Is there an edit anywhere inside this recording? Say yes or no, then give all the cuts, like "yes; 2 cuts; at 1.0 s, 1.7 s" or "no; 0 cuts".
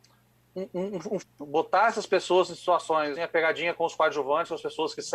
yes; 2 cuts; at 1.2 s, 3.1 s